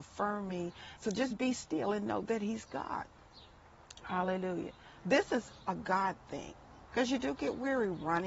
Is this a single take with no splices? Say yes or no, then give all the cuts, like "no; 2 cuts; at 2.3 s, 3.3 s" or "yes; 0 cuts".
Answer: no; 2 cuts; at 1.0 s, 6.9 s